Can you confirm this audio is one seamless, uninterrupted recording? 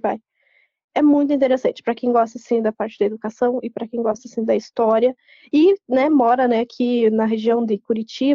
yes; 0 cuts

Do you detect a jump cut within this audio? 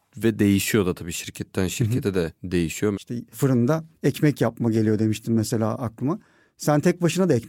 yes; 1 cut; at 2.9 s

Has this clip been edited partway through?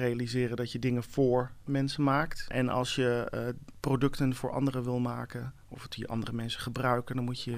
yes; 1 cut; at 2.5 s

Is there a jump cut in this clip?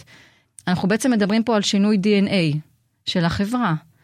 no; 0 cuts

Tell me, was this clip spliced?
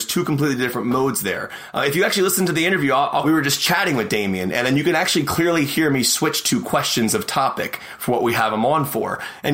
yes; 1 cut; at 3.2 s

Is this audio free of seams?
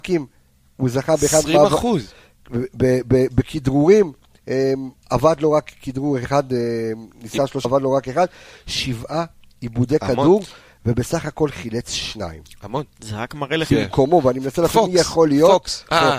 no; 2 cuts; at 7.6 s, 13.7 s

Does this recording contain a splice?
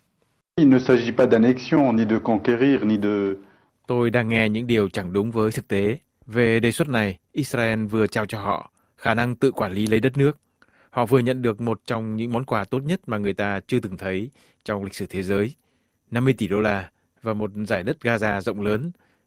yes; 1 cut; at 3.7 s

